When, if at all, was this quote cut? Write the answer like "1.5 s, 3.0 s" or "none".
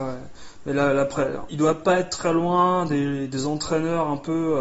1.5 s